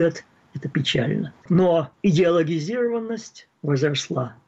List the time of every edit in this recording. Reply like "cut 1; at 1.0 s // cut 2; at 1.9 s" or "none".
cut 1; at 1.4 s